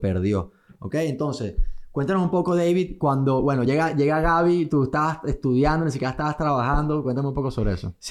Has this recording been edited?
no; 0 cuts

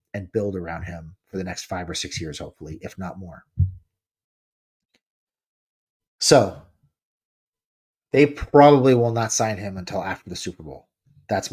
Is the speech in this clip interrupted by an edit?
no; 0 cuts

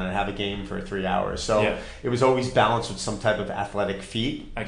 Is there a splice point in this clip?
no; 0 cuts

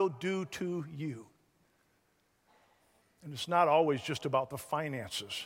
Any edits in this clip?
yes; 1 cut; at 3.0 s

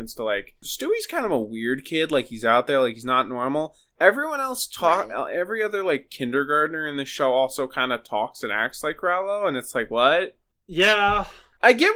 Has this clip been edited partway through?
no; 0 cuts

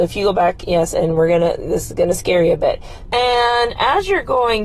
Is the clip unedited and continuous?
no; 1 cut; at 3.1 s

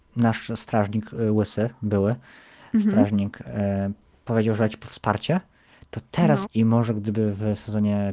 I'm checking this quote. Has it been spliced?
yes; 1 cut; at 6.4 s

